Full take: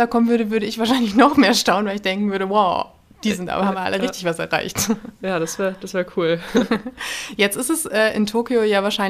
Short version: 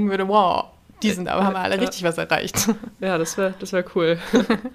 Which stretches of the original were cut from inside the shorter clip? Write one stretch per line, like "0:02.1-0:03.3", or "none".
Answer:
none

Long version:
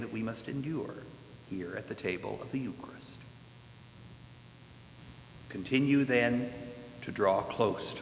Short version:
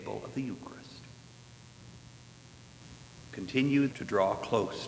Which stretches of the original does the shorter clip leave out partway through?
0:06.1-0:07.0

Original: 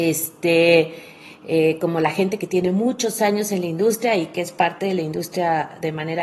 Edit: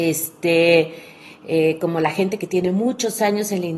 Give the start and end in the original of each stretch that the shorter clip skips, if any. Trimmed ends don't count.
none

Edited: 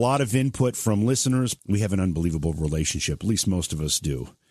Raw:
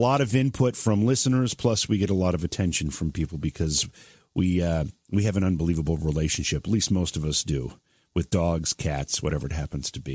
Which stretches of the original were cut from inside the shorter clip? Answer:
0:01.6-0:05.0

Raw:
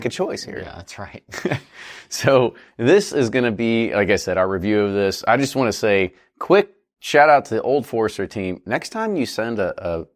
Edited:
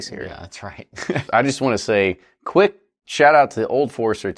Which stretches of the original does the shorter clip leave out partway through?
0:01.6-0:05.2

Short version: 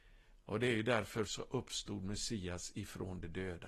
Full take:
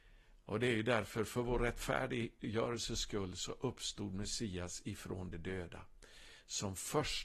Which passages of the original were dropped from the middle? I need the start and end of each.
0:01.3-0:03.4

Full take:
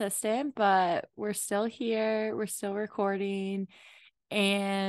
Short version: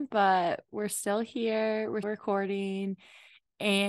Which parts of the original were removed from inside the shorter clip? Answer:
0:02.5-0:02.7

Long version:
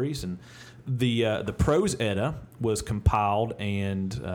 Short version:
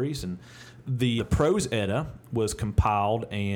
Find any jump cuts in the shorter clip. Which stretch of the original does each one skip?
0:01.2-0:01.4

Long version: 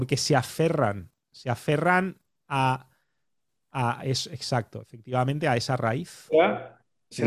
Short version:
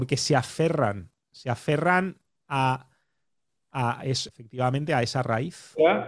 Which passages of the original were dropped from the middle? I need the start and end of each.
0:04.3-0:04.8

